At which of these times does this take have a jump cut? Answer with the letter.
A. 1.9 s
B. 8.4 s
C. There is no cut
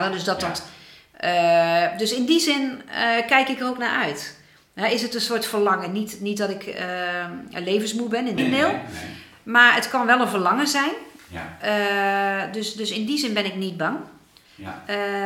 B